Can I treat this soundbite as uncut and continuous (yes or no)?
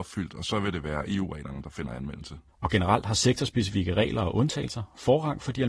no